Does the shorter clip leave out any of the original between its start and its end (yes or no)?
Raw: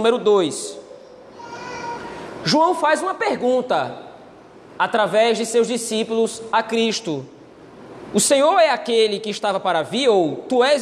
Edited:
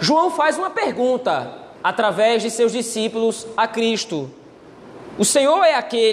yes